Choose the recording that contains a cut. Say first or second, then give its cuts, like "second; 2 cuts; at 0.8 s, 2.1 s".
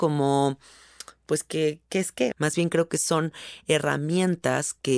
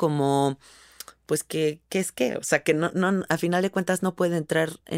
first; 1 cut; at 2.3 s